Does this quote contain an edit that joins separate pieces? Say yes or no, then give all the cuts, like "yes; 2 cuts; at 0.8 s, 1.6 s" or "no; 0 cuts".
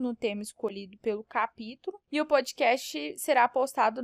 yes; 1 cut; at 2.0 s